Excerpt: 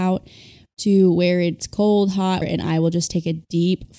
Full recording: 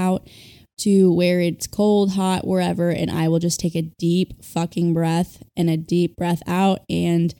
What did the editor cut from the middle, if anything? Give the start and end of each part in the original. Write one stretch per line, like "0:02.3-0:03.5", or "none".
0:02.4-0:02.9